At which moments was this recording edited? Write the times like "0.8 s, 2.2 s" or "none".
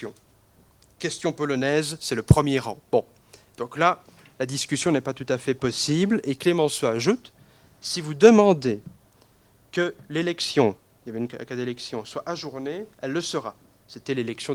2.8 s